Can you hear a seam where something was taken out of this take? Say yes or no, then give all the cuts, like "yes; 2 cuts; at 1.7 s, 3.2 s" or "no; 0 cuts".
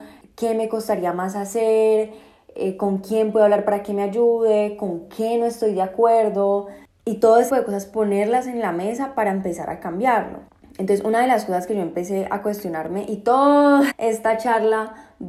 yes; 2 cuts; at 7.5 s, 13.9 s